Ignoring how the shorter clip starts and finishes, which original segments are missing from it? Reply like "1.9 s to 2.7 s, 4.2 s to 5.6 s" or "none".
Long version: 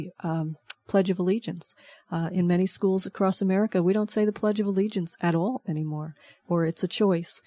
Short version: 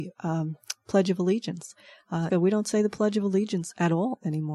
2.3 s to 3.7 s